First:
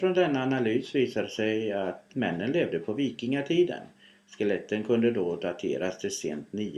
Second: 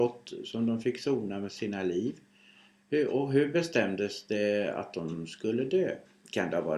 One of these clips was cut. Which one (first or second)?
first